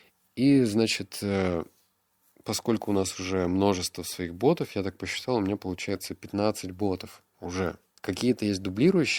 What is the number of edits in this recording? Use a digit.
1